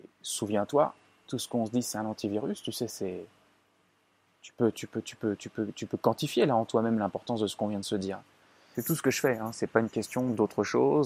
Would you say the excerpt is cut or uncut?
cut